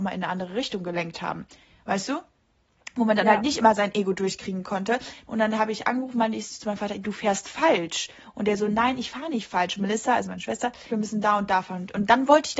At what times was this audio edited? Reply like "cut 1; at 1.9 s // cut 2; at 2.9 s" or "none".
cut 1; at 5.3 s // cut 2; at 10.9 s